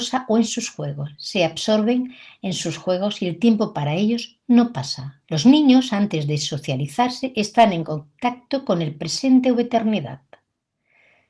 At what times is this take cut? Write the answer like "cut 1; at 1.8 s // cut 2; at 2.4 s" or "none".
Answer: cut 1; at 5.2 s